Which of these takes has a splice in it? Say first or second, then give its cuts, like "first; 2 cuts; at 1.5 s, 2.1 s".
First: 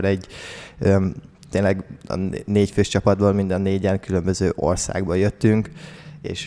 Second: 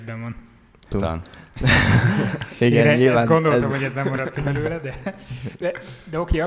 second; 1 cut; at 0.9 s